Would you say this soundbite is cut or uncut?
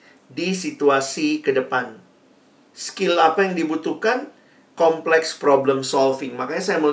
cut